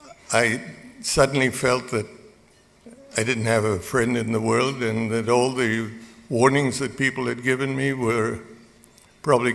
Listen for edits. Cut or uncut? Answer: uncut